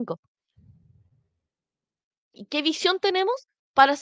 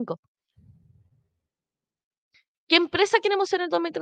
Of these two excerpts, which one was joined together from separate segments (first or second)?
first